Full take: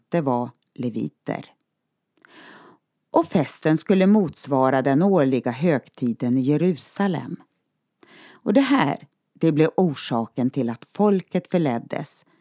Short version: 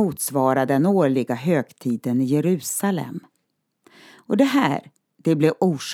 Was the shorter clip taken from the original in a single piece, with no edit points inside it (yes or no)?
yes